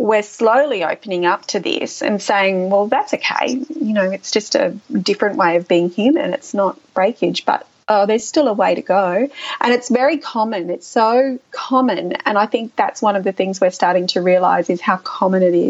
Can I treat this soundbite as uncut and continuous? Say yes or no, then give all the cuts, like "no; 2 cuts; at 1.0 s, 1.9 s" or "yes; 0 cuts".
yes; 0 cuts